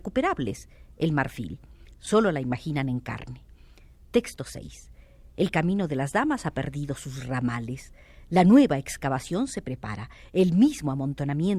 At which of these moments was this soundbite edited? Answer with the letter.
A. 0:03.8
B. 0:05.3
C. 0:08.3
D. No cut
D